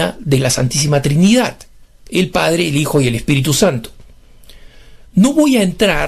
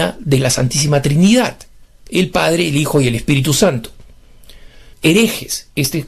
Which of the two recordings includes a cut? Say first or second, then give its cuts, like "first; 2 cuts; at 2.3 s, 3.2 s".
second; 1 cut; at 4.9 s